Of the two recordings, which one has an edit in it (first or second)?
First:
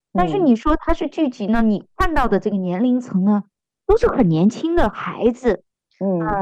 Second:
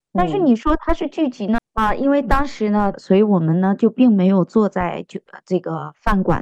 second